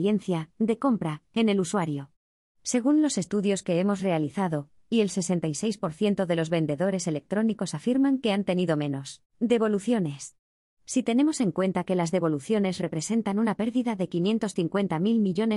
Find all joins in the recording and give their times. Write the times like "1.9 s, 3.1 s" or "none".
4.8 s